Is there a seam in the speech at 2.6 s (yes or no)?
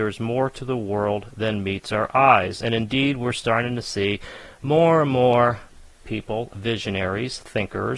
no